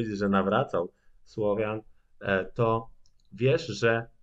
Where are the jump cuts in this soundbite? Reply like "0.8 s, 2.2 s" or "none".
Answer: none